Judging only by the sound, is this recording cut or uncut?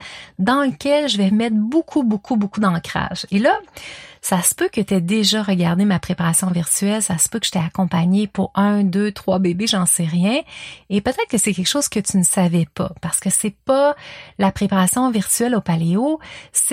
uncut